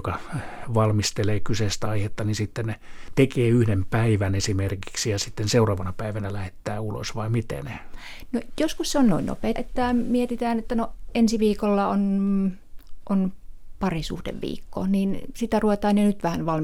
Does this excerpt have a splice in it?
yes; 1 cut; at 9.6 s

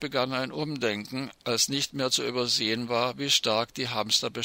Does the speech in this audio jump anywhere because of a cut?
no; 0 cuts

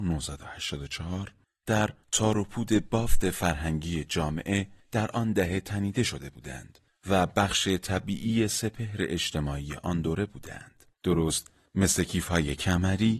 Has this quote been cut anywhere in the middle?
yes; 1 cut; at 10.9 s

